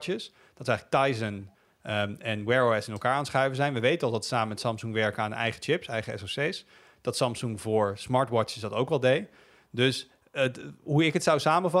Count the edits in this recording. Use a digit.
0